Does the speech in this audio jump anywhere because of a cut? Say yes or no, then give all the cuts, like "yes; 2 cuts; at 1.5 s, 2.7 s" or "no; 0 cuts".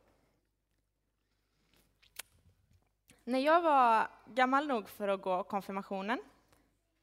no; 0 cuts